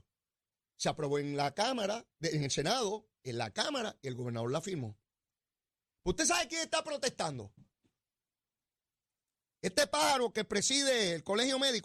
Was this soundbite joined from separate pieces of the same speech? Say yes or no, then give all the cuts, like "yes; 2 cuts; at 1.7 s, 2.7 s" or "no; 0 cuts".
no; 0 cuts